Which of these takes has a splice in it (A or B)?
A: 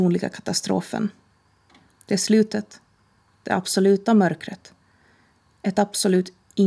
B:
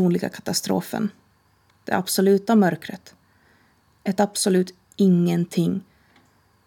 B